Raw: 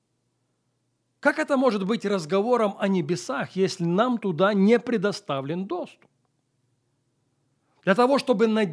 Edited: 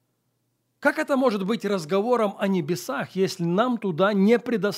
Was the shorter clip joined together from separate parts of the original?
no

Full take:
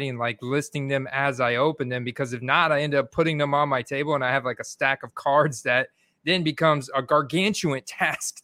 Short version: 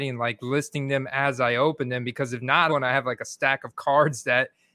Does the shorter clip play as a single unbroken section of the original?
no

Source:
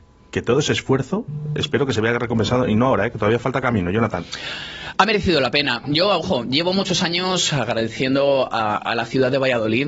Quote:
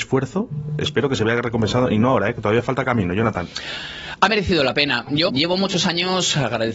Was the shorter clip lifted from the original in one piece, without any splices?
no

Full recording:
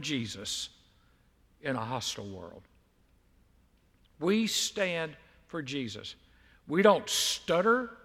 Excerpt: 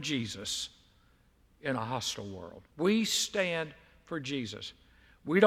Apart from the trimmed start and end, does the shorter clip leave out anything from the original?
yes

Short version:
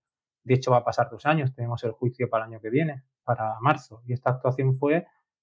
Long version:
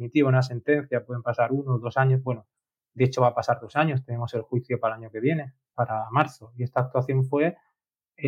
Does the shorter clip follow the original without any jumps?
yes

